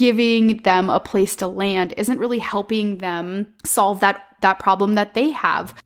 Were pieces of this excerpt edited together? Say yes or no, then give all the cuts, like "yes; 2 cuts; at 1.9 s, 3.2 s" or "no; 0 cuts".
yes; 1 cut; at 3.6 s